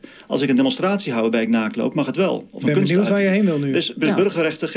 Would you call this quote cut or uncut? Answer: uncut